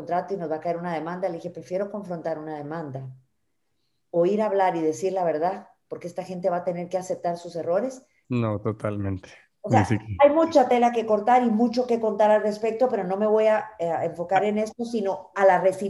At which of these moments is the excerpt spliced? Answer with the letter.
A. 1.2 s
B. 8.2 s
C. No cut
B